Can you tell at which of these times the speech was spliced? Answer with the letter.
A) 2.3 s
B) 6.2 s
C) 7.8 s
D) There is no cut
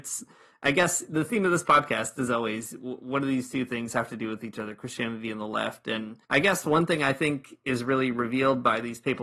B